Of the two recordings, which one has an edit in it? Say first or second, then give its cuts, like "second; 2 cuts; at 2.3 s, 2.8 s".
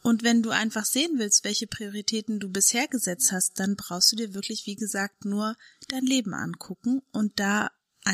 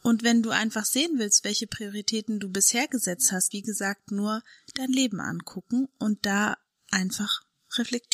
second; 1 cut; at 3.5 s